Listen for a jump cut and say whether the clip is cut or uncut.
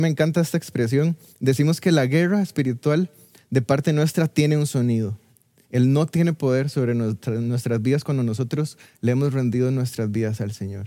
cut